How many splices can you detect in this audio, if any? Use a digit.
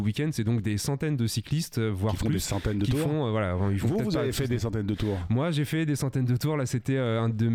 0